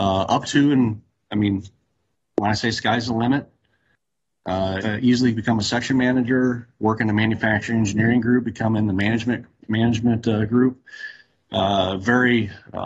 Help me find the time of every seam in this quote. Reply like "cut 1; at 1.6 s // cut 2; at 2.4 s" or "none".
cut 1; at 4.8 s